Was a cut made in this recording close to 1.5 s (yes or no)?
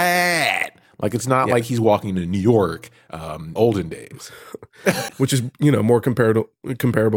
no